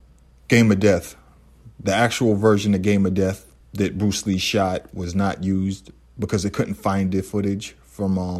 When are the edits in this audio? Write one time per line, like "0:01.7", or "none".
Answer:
0:01.8
0:03.6